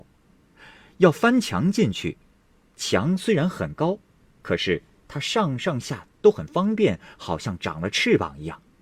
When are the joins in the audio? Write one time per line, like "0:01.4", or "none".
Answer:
0:05.8